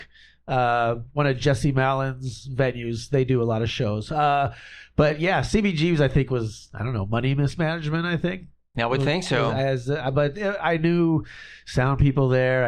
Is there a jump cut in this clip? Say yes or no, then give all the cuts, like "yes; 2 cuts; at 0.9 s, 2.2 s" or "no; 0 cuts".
no; 0 cuts